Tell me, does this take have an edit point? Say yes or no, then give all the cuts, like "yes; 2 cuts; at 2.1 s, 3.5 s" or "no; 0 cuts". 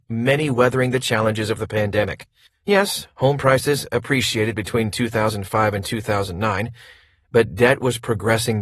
yes; 1 cut; at 2.5 s